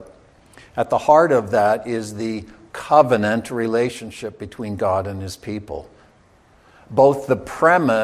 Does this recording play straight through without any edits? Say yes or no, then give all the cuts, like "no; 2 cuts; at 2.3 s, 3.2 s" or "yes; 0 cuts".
yes; 0 cuts